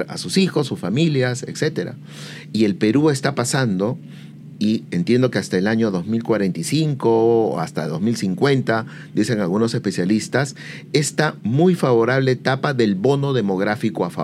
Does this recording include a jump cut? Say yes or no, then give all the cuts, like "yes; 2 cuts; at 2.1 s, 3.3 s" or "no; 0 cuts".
no; 0 cuts